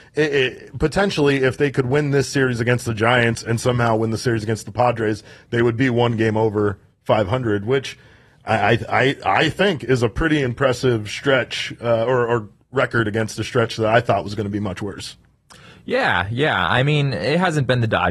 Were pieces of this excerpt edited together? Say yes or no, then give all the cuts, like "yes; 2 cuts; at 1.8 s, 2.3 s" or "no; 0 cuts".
no; 0 cuts